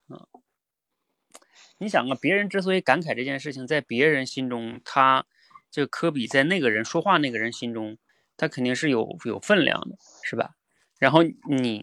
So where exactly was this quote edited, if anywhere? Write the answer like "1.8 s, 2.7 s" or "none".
none